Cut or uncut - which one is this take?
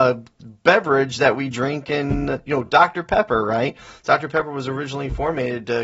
uncut